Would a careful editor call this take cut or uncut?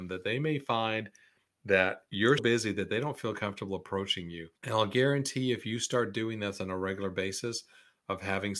cut